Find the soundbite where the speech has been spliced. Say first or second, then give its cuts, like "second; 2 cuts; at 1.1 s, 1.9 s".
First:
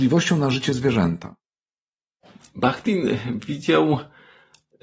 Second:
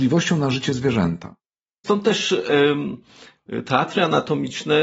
second; 1 cut; at 1.8 s